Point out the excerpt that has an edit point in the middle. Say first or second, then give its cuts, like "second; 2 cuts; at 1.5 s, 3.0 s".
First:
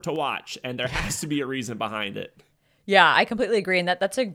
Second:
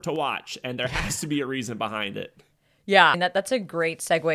second; 1 cut; at 3.1 s